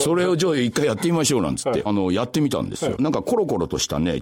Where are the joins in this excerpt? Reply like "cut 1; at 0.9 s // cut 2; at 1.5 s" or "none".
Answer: cut 1; at 1.9 s // cut 2; at 3.0 s